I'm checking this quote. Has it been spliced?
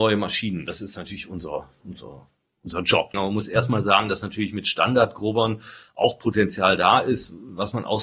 yes; 1 cut; at 3.1 s

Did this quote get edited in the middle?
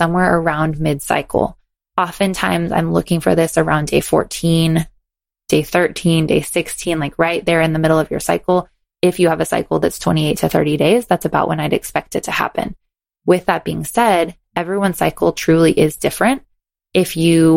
no; 0 cuts

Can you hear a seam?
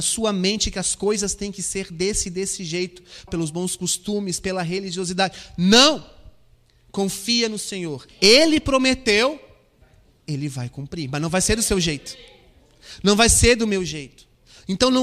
yes; 2 cuts; at 3.3 s, 8.1 s

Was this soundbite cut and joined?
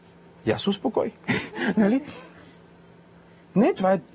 no; 0 cuts

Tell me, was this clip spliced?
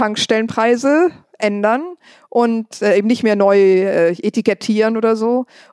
no; 0 cuts

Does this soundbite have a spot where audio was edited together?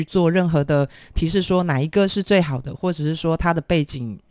no; 0 cuts

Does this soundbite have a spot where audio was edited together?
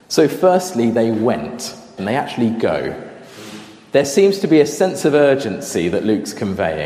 yes; 1 cut; at 2.0 s

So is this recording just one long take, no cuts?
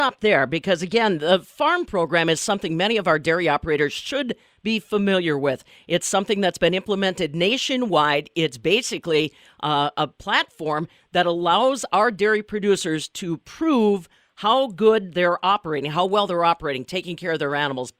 yes; 0 cuts

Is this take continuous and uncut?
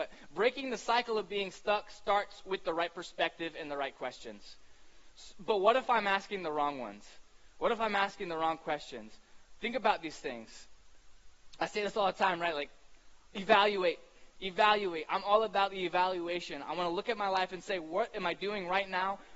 yes; 0 cuts

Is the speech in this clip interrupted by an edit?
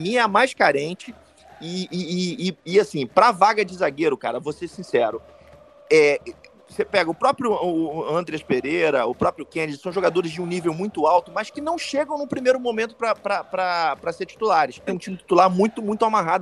yes; 1 cut; at 14.9 s

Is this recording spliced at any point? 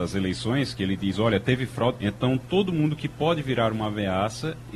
yes; 1 cut; at 2.0 s

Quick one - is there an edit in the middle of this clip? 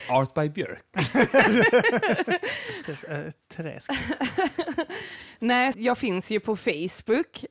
yes; 2 cuts; at 2.8 s, 5.7 s

